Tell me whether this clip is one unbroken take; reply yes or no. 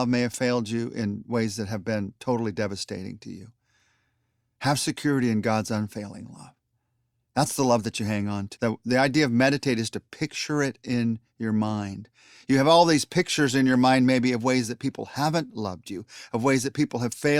no